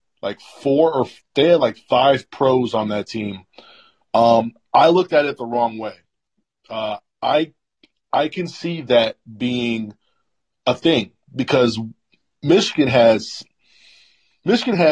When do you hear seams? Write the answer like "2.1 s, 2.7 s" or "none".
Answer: none